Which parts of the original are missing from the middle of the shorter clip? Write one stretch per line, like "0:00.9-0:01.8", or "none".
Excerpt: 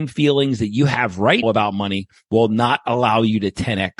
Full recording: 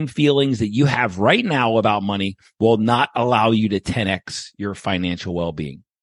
0:01.4-0:01.7